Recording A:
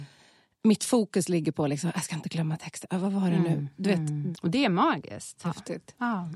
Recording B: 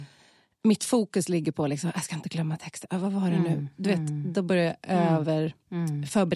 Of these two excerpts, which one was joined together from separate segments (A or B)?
A